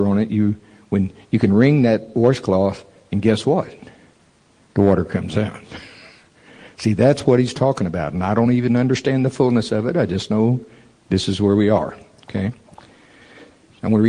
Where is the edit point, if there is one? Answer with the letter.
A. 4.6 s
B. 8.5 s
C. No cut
C